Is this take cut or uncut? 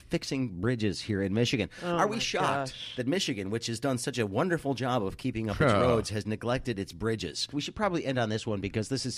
cut